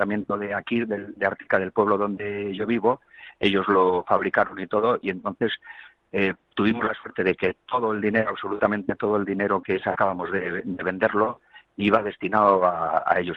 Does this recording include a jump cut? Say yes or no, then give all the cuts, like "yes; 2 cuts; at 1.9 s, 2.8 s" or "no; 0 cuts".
no; 0 cuts